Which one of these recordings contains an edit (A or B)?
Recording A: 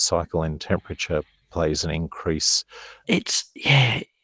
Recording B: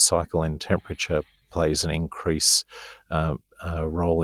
A